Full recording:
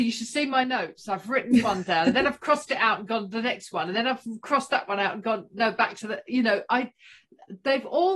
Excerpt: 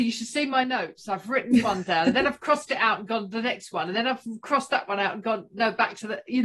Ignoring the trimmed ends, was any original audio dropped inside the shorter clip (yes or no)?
no